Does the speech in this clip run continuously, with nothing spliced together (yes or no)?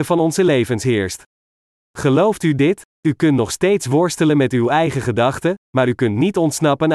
yes